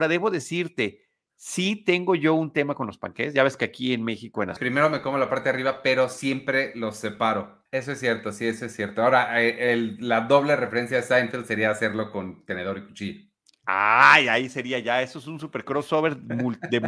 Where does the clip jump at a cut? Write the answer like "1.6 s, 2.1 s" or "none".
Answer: 4.6 s, 7.7 s